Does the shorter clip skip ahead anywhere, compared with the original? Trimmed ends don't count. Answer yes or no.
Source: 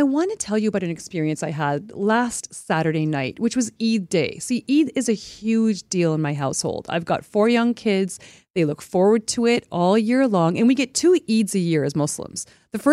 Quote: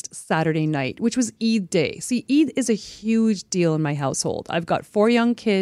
no